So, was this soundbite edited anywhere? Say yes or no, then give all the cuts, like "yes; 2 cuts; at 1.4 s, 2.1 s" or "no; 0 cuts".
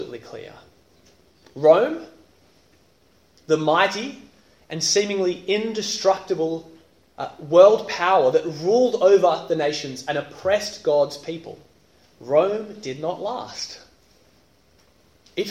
no; 0 cuts